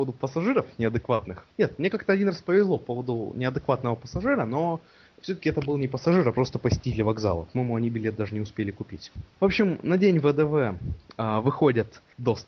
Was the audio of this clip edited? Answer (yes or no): no